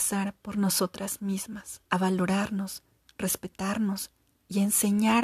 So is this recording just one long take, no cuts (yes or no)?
no